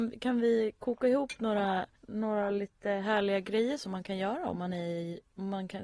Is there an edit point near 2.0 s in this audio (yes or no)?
yes